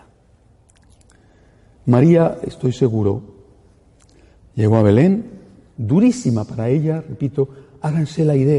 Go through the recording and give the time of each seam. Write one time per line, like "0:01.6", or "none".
0:05.8